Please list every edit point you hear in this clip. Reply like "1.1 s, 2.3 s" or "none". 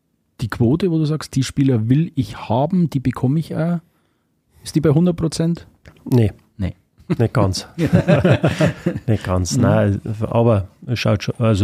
none